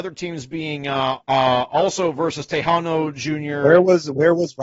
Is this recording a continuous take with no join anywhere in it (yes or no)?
no